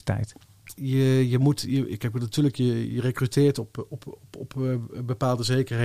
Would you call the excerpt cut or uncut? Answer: uncut